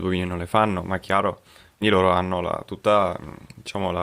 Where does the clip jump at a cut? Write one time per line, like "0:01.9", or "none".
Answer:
0:01.8